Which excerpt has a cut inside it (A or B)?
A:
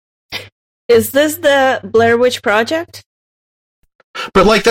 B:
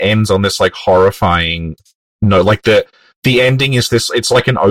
B